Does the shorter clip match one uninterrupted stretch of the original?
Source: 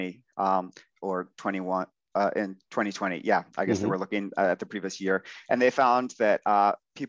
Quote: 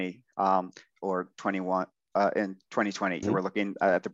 no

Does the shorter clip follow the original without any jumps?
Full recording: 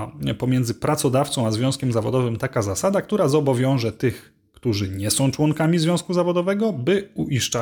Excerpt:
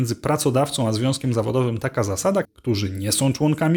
no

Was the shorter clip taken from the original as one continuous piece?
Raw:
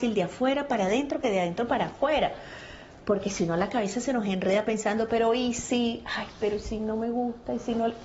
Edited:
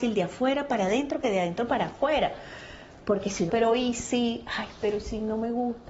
no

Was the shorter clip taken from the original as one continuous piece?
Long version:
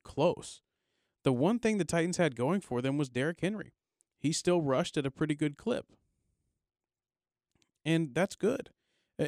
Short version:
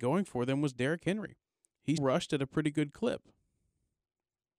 no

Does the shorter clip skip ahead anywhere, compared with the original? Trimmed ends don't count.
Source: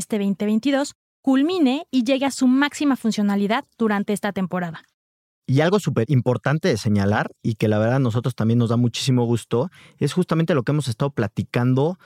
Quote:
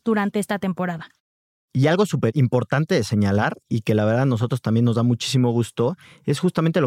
no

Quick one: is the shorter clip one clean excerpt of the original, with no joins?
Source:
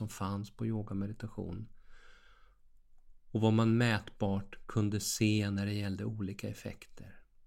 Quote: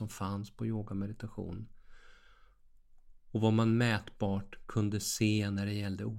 yes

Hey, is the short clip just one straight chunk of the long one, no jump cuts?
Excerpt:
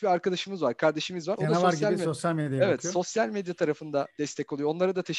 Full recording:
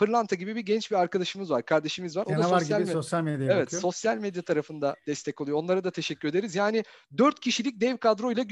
yes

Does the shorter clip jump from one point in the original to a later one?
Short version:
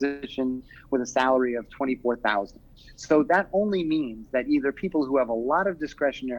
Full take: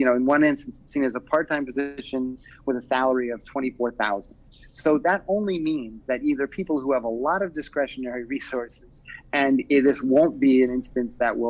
no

